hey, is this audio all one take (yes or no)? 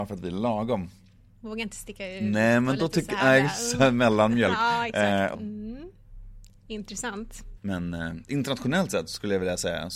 no